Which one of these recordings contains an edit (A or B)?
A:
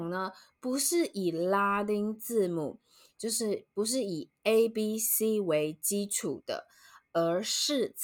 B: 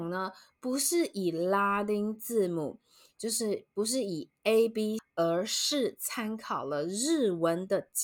B